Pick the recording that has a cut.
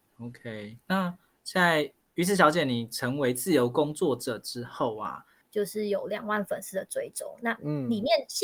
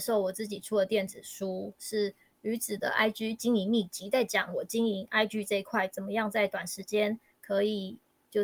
first; 1 cut; at 5.4 s

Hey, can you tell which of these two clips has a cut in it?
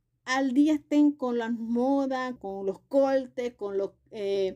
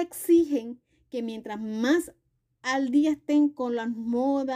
first; 1 cut; at 2.4 s

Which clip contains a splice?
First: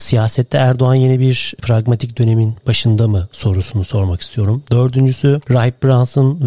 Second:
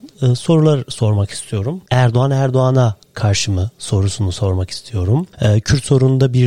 second; 1 cut; at 1.9 s

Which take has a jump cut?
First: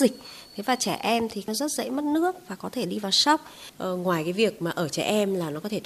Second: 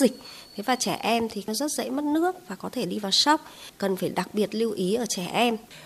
first; 1 cut; at 3.7 s

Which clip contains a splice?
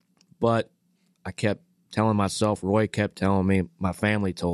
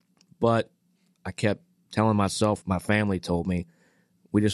second; 1 cut; at 2.6 s

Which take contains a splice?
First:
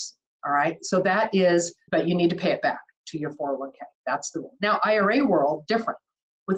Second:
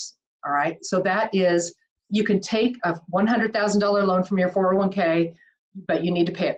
first; 2 cuts; at 1.9 s, 3.9 s

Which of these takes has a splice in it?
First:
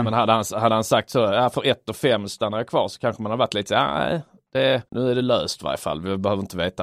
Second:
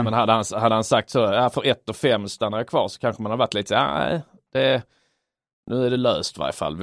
first; 1 cut; at 4.9 s

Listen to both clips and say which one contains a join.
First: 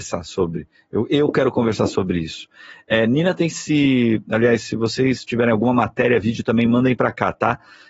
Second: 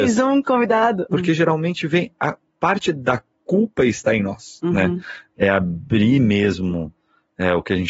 second; 2 cuts; at 1.1 s, 5.3 s

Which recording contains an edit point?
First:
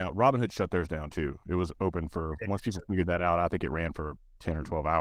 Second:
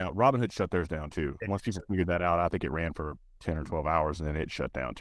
second; 1 cut; at 1.4 s

